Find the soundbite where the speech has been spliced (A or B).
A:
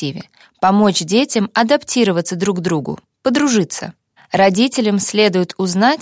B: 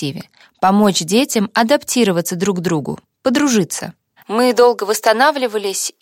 B